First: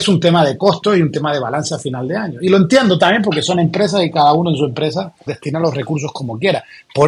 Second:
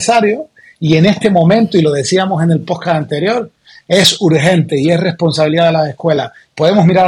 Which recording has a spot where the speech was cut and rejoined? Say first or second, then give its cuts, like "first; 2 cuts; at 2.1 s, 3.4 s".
first; 1 cut; at 5.3 s